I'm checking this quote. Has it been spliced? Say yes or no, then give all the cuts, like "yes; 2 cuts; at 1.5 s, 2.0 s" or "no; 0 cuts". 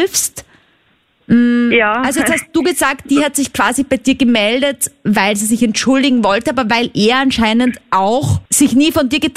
yes; 1 cut; at 8.5 s